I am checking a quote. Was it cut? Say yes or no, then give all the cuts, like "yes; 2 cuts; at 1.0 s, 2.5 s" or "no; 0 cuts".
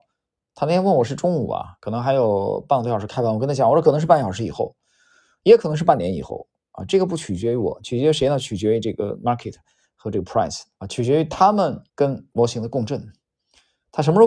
yes; 2 cuts; at 10.8 s, 11.9 s